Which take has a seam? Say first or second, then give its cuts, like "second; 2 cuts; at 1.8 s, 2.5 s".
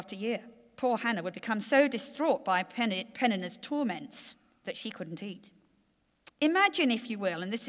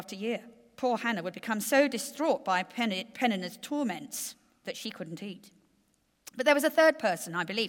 first; 1 cut; at 6.3 s